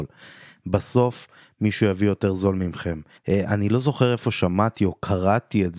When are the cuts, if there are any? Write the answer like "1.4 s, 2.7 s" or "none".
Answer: 3.2 s